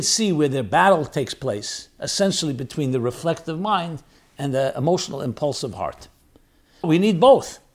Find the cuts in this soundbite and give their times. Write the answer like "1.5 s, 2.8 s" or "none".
6.8 s